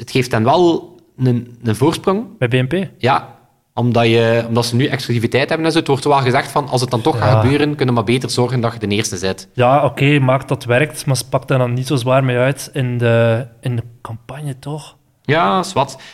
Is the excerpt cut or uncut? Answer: uncut